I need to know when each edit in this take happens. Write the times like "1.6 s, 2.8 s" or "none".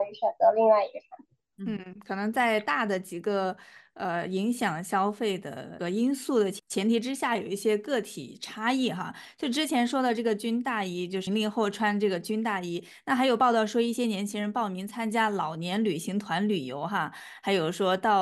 11.3 s